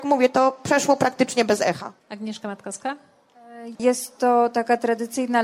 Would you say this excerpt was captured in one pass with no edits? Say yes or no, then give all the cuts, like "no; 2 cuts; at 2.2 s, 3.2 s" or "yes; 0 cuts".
no; 2 cuts; at 2.0 s, 3.7 s